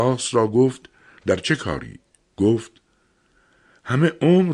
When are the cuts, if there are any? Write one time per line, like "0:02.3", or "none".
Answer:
0:02.2